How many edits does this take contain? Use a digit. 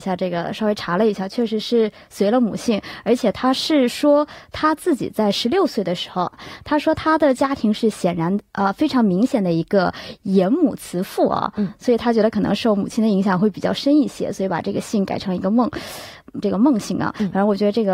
2